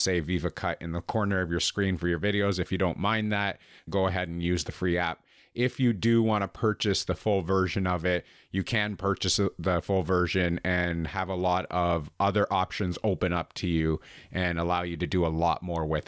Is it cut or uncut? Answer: cut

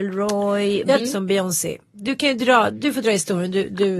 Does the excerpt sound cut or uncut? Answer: cut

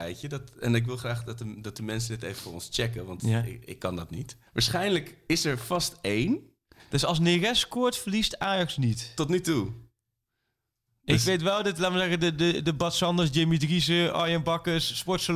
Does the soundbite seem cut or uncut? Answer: cut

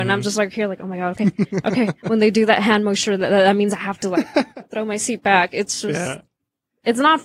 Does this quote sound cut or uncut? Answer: uncut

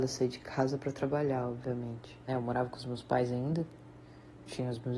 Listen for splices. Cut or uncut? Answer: cut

